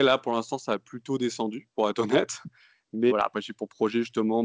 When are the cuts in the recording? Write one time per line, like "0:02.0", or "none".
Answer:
0:03.1